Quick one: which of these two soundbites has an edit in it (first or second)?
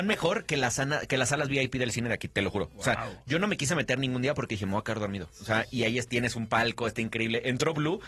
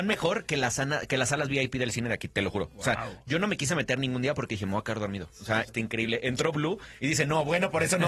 second